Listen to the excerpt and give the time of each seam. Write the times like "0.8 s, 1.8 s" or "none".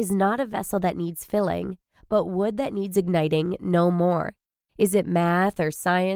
4.7 s